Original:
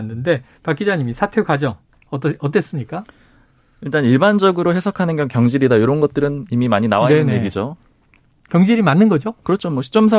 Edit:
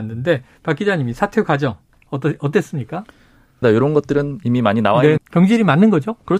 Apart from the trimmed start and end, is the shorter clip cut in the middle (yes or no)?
yes